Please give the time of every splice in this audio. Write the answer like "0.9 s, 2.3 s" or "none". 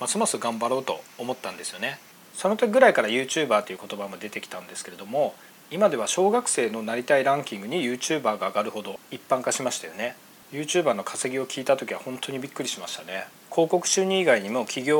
none